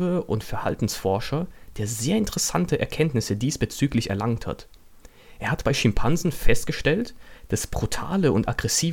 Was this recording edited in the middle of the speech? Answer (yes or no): no